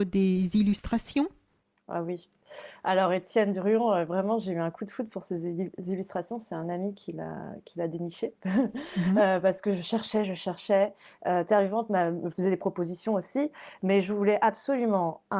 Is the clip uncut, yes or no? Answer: yes